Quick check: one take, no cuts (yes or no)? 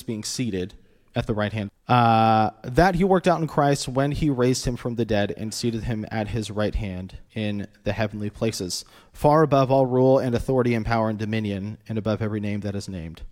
no